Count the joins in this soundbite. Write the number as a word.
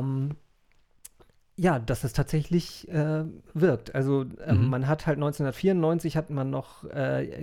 zero